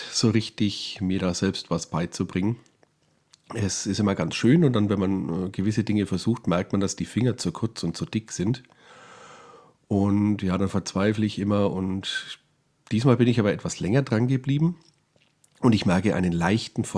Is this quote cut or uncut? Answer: uncut